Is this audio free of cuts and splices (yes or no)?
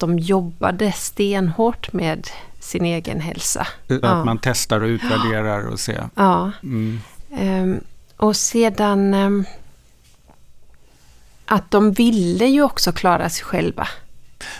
no